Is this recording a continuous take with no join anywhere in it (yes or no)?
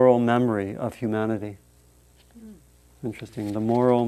yes